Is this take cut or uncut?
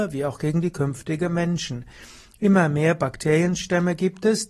uncut